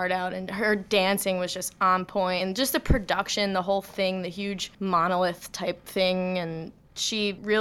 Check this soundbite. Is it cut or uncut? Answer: uncut